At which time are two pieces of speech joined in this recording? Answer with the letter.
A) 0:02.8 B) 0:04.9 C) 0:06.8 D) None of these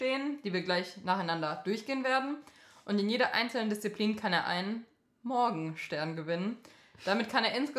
D